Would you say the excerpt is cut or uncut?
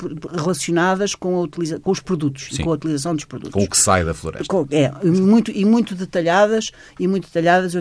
uncut